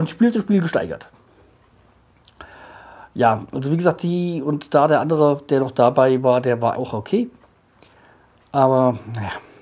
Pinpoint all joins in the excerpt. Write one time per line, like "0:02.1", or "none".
0:06.7